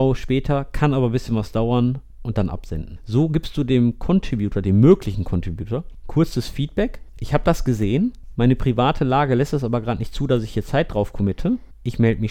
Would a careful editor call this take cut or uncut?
uncut